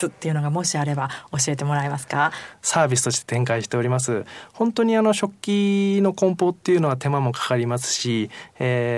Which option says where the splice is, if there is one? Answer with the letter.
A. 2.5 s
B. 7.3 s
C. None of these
A